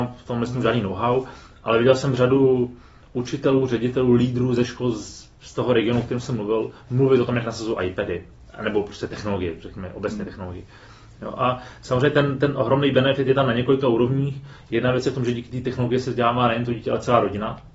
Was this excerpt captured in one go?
yes; 0 cuts

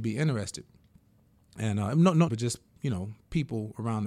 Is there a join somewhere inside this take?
yes; 1 cut; at 2.3 s

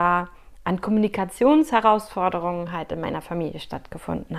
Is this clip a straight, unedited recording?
yes; 0 cuts

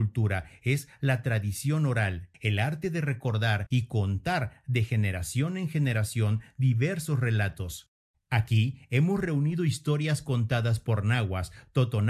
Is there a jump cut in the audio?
yes; 1 cut; at 2.3 s

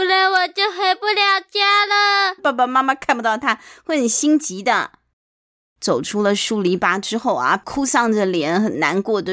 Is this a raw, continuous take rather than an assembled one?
no; 2 cuts; at 2.4 s, 5.7 s

